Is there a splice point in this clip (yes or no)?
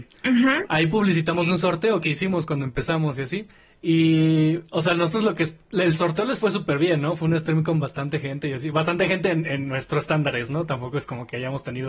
no